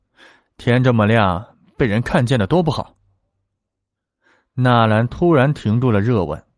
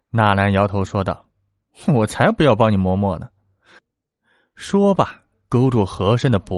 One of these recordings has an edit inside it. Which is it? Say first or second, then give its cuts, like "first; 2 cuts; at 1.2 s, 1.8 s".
second; 1 cut; at 3.8 s